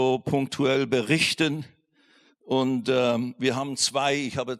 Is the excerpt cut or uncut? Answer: uncut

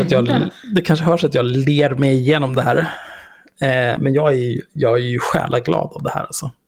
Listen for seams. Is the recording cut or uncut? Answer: uncut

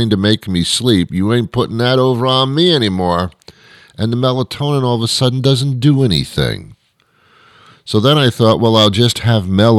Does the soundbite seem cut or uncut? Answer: uncut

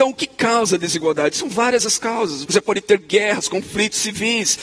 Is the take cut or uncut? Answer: cut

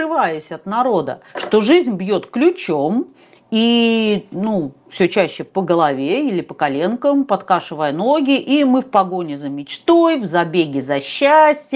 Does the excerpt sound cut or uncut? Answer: cut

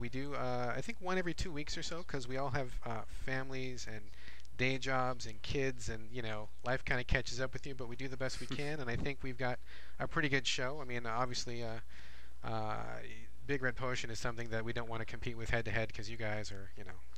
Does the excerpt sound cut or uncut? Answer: uncut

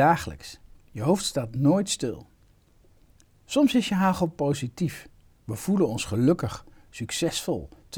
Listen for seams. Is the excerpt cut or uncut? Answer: uncut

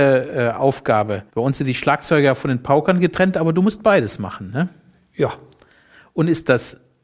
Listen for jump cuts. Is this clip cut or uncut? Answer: cut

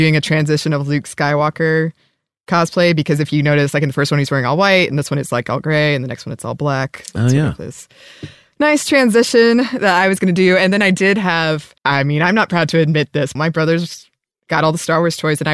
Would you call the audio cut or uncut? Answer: cut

